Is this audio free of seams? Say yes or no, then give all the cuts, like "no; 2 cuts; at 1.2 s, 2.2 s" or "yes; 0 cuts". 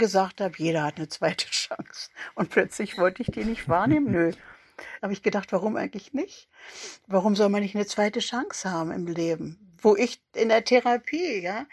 no; 1 cut; at 5.0 s